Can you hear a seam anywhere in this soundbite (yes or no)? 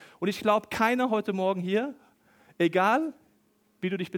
no